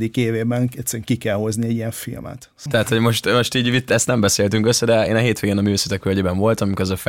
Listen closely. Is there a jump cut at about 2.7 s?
yes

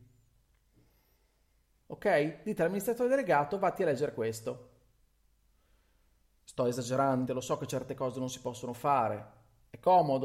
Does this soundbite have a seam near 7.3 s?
yes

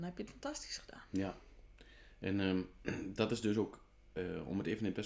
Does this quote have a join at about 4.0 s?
no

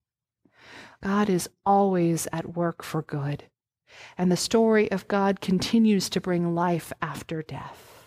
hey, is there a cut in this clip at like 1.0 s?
yes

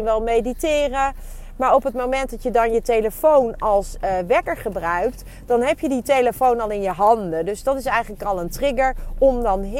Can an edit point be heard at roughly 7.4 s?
no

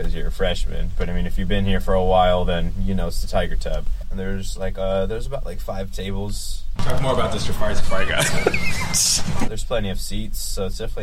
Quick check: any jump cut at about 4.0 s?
yes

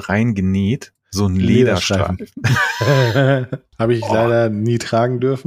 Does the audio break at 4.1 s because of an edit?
no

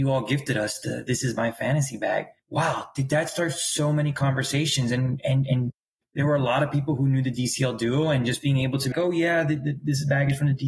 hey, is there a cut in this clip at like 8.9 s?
yes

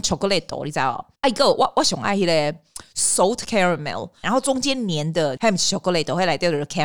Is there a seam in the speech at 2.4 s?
no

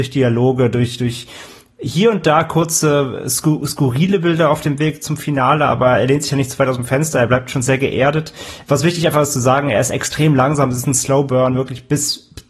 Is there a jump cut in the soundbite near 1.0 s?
no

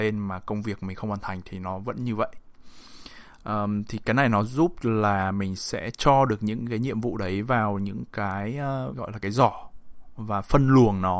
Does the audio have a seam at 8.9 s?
yes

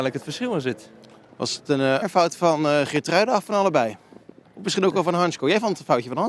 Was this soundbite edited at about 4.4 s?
no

